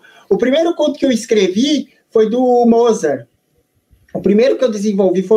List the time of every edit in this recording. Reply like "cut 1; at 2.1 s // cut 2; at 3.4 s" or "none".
none